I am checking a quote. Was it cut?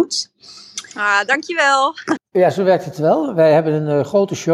yes; 1 cut; at 2.2 s

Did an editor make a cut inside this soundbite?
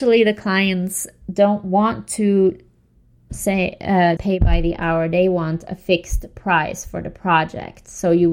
yes; 1 cut; at 4.2 s

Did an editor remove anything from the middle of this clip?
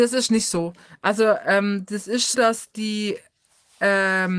yes; 1 cut; at 2.3 s

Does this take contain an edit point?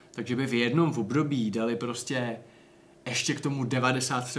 no; 0 cuts

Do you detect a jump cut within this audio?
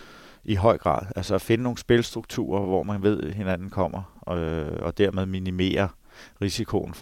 no; 0 cuts

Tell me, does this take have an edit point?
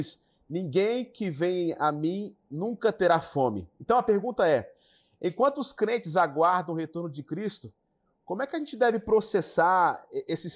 no; 0 cuts

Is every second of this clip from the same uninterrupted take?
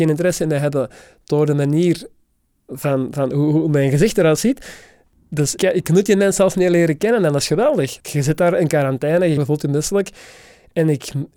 no; 3 cuts; at 5.6 s, 8.0 s, 9.4 s

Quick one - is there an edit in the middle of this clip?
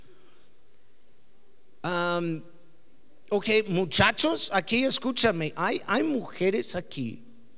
no; 0 cuts

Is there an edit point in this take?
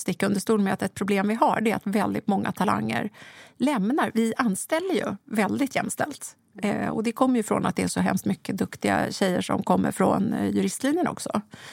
no; 0 cuts

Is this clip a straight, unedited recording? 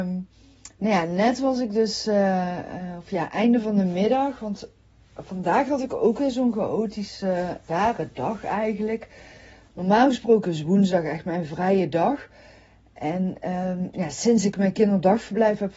no; 1 cut; at 7.7 s

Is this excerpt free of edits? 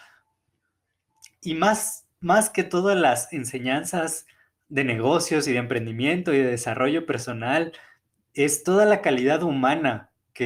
no; 1 cut; at 1.4 s

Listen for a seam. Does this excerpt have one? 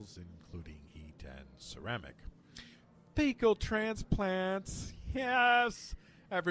no; 0 cuts

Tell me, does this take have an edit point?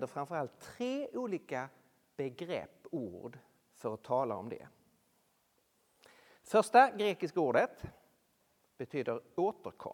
no; 0 cuts

